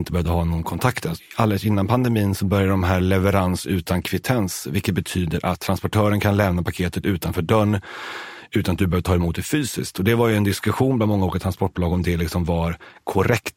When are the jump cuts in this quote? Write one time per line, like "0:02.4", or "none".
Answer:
0:01.2